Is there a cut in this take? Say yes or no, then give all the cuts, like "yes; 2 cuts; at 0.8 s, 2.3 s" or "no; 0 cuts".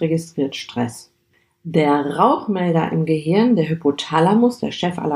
no; 0 cuts